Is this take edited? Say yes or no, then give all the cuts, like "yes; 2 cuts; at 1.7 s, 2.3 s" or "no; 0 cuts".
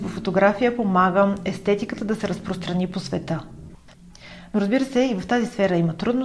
no; 0 cuts